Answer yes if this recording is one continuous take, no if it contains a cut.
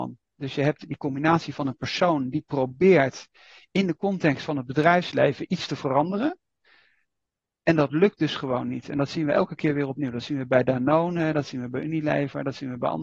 yes